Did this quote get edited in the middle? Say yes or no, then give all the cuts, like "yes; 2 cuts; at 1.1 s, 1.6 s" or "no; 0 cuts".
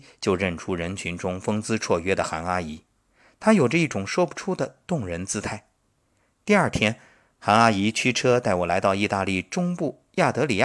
no; 0 cuts